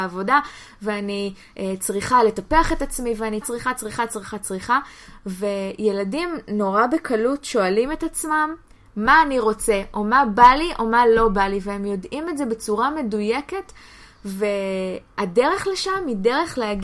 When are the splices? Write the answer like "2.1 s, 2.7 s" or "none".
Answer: 3.4 s